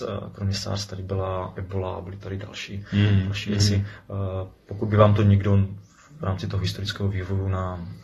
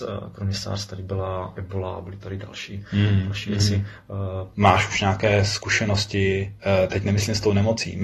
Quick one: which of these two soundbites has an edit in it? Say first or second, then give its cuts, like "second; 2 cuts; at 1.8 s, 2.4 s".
second; 1 cut; at 4.5 s